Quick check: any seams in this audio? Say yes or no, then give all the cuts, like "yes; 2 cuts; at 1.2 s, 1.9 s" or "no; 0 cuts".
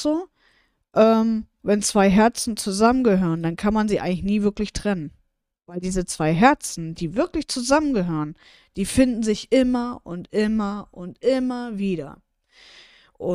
yes; 1 cut; at 1.6 s